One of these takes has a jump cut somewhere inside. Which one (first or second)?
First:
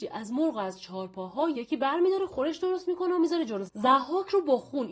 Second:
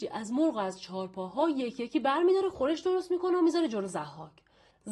first